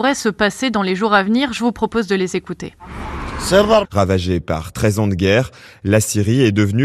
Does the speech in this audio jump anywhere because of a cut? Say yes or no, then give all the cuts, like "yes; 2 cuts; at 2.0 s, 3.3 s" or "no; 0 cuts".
yes; 1 cut; at 3.8 s